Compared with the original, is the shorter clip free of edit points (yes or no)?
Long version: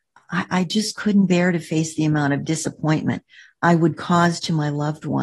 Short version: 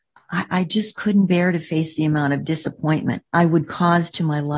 no